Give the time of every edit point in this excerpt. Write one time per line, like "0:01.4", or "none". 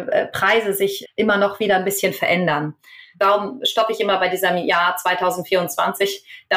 0:01.0
0:03.1